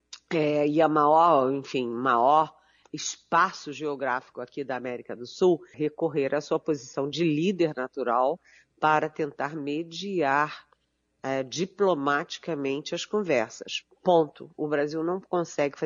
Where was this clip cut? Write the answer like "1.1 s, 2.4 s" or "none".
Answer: 5.7 s